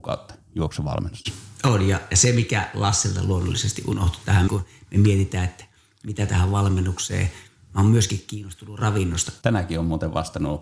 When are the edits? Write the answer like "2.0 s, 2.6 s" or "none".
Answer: 4.5 s, 9.4 s